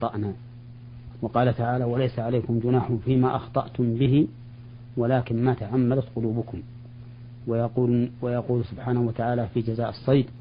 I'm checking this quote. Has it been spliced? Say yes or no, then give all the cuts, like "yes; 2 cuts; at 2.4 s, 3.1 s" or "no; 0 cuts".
no; 0 cuts